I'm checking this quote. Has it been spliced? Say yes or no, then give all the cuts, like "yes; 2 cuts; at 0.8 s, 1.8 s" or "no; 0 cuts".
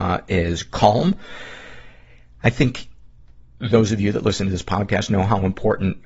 no; 0 cuts